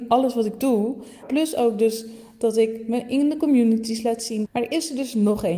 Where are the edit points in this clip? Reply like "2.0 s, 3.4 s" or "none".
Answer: 1.2 s, 4.4 s